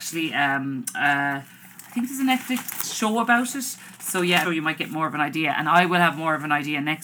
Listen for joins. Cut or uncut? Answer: cut